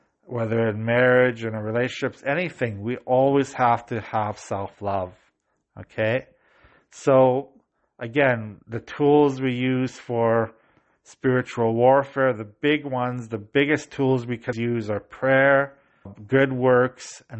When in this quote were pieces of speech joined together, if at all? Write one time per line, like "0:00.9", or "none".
0:14.5
0:16.1